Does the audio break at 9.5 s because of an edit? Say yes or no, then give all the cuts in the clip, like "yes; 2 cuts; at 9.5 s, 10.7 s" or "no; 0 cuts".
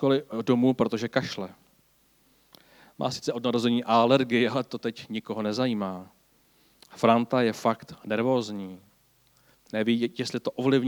yes; 1 cut; at 9.5 s